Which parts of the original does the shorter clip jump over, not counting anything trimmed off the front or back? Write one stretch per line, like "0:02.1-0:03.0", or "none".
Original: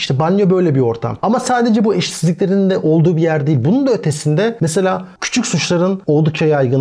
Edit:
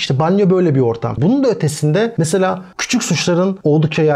0:01.2-0:03.6